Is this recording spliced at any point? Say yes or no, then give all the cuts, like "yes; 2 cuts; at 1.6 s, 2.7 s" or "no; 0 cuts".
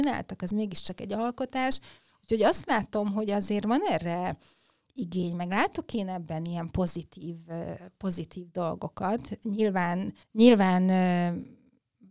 yes; 1 cut; at 10.2 s